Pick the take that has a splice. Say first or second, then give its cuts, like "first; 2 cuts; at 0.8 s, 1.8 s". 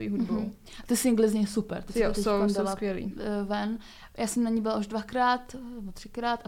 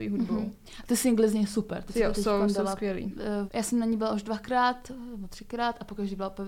second; 1 cut; at 3.5 s